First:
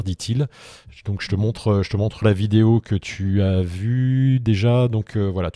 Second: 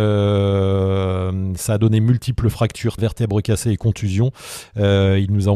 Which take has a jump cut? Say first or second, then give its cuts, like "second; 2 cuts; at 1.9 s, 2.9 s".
second; 1 cut; at 3.0 s